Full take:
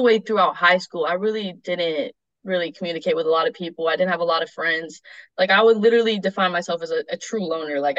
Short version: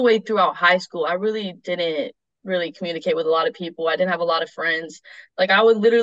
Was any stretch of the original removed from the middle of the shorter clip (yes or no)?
no